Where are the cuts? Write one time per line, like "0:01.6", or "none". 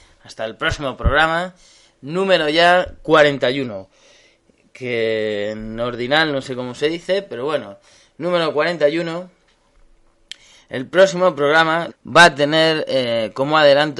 0:11.9